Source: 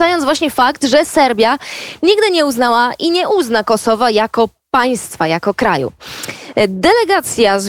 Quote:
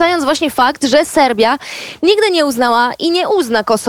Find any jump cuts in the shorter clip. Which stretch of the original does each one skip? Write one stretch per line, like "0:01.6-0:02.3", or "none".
none